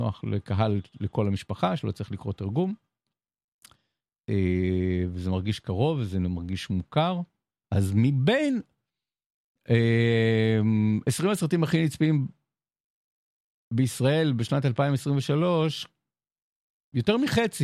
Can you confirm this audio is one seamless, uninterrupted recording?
no; 1 cut; at 7.6 s

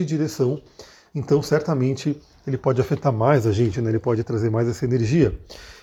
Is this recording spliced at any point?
no; 0 cuts

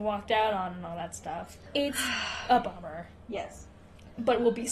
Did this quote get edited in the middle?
yes; 1 cut; at 3.3 s

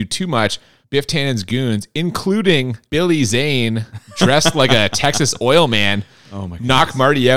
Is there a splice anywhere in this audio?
no; 0 cuts

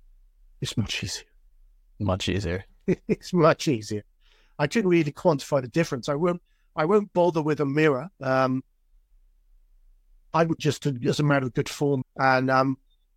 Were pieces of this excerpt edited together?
yes; 3 cuts; at 8.1 s, 10.6 s, 12.0 s

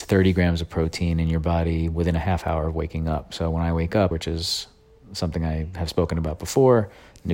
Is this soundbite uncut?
no; 1 cut; at 4.1 s

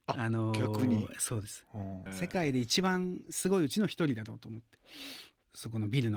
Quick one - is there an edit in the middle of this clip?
yes; 1 cut; at 2.1 s

